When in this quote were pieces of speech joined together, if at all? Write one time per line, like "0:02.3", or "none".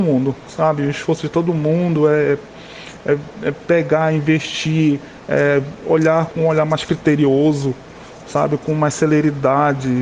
0:06.3